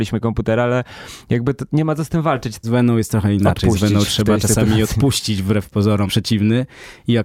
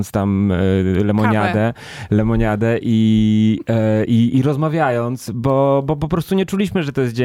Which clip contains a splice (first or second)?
first